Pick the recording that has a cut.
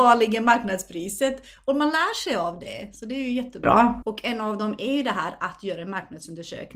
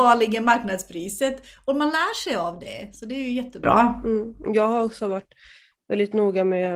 first; 1 cut; at 4.0 s

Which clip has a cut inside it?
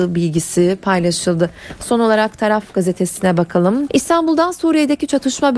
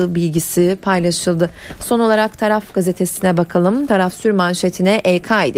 first; 1 cut; at 3.9 s

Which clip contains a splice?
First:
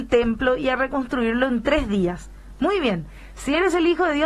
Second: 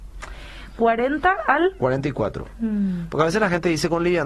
second; 1 cut; at 2.5 s

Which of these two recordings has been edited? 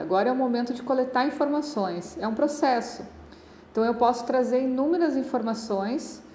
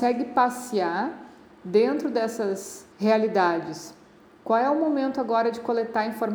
second; 1 cut; at 2.9 s

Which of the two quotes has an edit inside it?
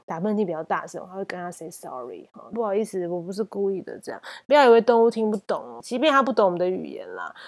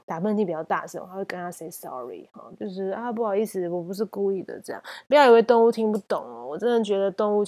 first; 2 cuts; at 2.5 s, 5.8 s

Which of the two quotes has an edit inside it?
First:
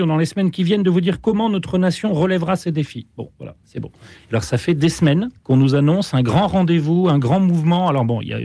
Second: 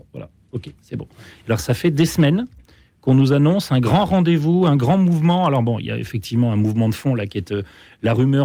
first; 2 cuts; at 3.6 s, 5.4 s

